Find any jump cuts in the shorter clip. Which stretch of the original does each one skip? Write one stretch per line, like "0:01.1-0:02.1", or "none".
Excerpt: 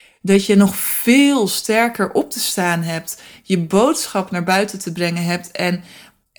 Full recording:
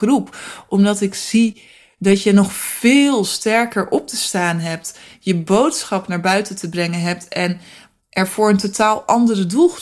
none